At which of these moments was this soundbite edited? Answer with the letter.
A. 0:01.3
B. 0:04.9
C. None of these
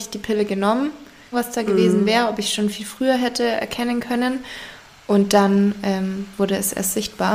A